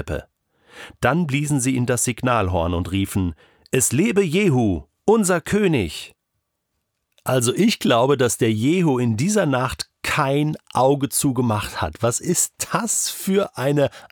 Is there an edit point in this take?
no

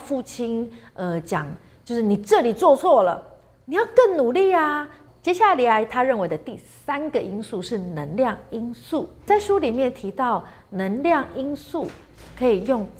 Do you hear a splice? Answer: yes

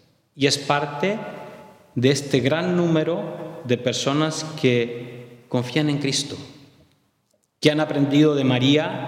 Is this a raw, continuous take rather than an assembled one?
yes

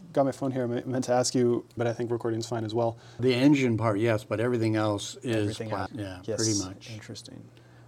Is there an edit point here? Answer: yes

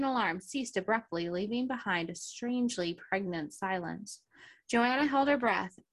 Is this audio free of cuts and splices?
yes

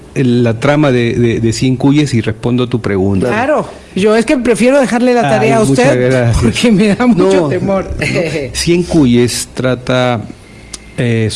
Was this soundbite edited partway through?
yes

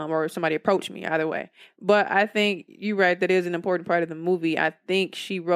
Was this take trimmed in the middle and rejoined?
no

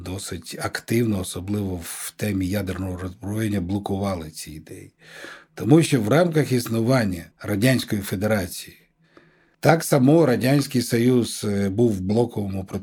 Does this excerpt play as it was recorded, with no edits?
no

